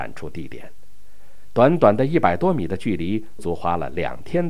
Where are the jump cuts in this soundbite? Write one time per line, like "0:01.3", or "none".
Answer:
0:03.4

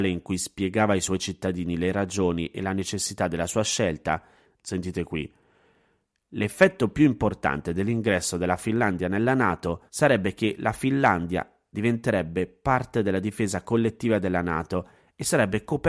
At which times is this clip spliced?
0:04.6
0:09.9

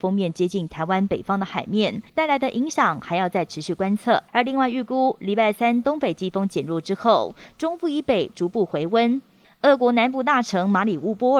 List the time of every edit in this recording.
0:02.1
0:04.3
0:09.4

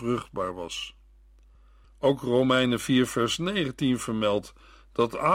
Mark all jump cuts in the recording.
0:01.8

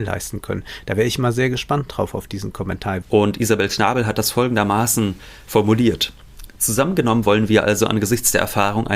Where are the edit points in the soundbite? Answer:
0:03.0

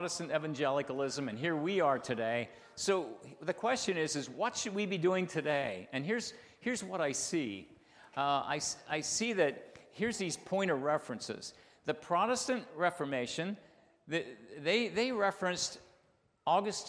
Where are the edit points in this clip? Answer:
none

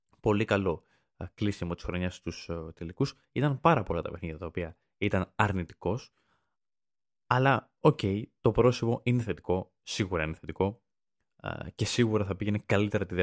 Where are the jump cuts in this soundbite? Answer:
none

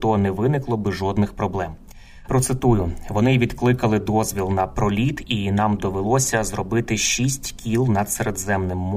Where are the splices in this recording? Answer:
0:02.3

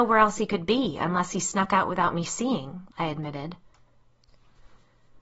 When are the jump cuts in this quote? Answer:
0:02.9

